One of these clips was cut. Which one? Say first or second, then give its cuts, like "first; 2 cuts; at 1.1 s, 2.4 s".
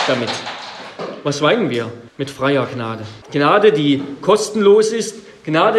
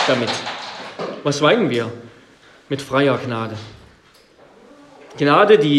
first; 2 cuts; at 2.1 s, 3.2 s